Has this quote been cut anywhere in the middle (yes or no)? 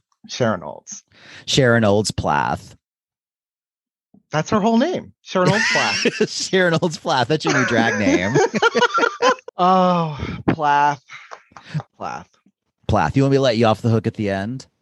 yes